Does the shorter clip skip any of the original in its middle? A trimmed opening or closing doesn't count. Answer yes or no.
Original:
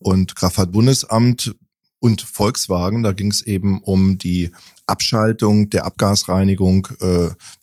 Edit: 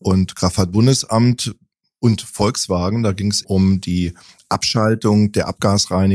yes